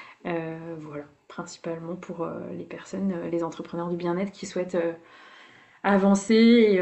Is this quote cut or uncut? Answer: uncut